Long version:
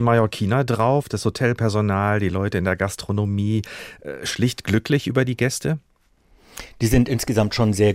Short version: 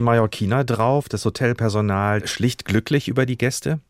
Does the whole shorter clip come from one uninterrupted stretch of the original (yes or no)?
no